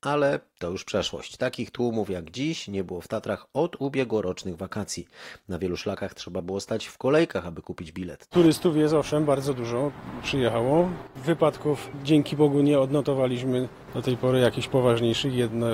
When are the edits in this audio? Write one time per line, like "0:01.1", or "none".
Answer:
0:08.3